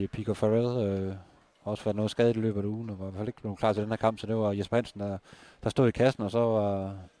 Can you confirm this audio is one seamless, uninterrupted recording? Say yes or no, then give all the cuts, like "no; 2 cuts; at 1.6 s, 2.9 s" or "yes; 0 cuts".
yes; 0 cuts